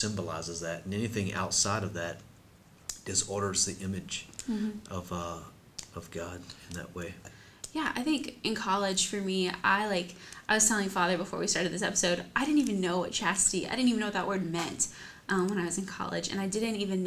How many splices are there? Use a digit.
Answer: 0